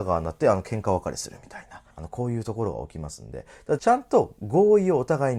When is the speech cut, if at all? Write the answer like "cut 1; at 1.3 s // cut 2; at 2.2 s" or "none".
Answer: cut 1; at 1.9 s // cut 2; at 3.8 s